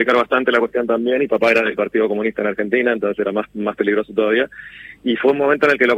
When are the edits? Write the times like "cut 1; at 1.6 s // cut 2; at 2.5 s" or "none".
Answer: none